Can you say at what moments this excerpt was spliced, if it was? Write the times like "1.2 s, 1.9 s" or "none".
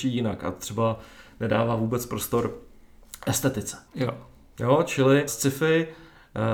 3.9 s, 5.3 s